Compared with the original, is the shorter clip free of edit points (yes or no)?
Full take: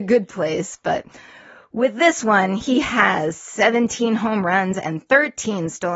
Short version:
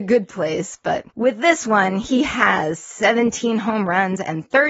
no